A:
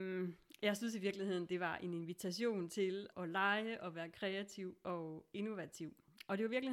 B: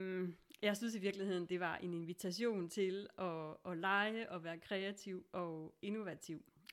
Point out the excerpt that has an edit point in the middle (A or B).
A